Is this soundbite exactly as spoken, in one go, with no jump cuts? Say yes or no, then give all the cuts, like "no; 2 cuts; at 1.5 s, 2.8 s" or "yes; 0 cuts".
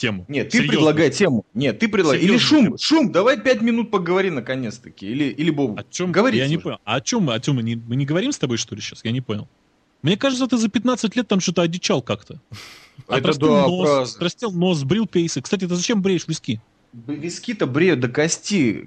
yes; 0 cuts